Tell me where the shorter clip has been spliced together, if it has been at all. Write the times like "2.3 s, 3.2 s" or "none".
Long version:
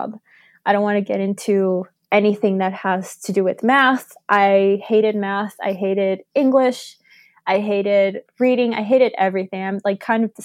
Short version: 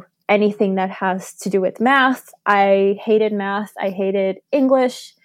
none